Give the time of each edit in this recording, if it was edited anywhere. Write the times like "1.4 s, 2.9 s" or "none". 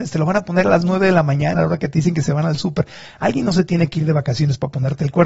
1.5 s